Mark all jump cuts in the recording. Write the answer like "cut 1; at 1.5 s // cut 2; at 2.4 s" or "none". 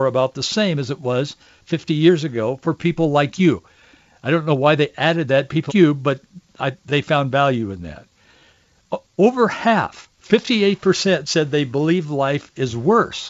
cut 1; at 5.7 s